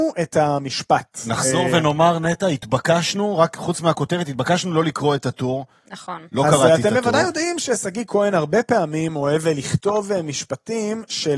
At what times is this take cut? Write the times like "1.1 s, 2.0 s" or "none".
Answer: none